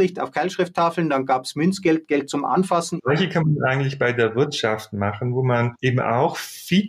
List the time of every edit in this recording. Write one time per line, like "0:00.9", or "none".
0:03.0